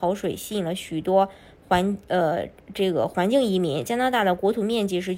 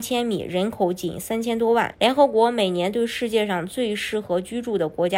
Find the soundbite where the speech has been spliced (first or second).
second